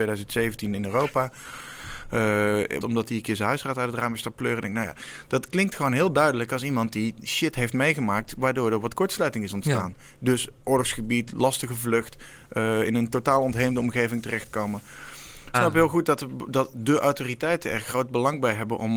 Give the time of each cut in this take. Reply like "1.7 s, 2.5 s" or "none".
2.8 s, 15.5 s

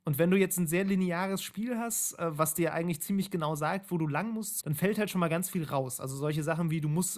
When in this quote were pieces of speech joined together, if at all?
4.6 s

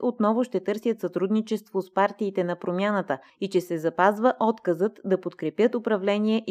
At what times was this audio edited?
none

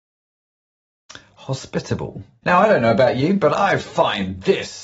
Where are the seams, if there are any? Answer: 2.4 s

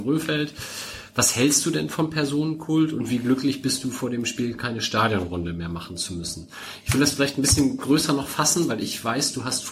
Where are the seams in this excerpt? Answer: none

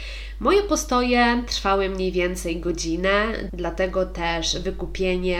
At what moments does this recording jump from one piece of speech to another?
3.5 s

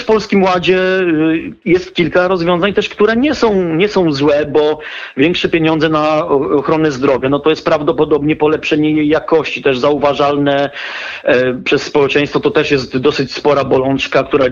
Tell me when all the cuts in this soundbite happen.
none

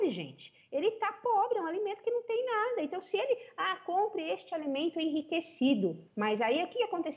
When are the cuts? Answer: 6.1 s

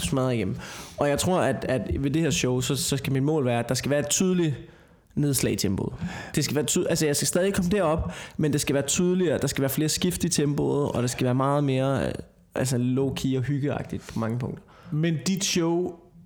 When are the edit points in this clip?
none

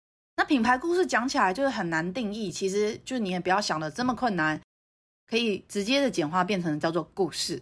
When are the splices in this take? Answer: none

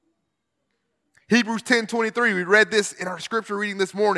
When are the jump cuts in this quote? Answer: 1.2 s

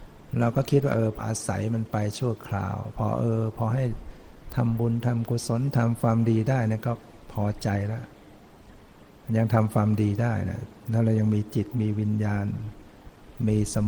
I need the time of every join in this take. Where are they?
1.2 s

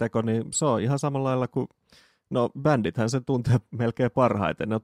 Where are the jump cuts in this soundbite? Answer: none

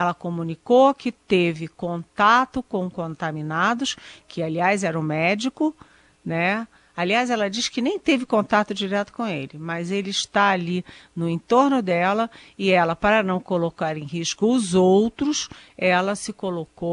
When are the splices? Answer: none

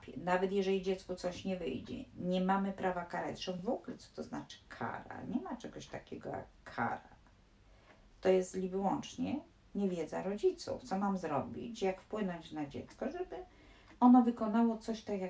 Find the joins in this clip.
none

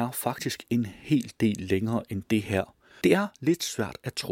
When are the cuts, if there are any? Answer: 3.0 s

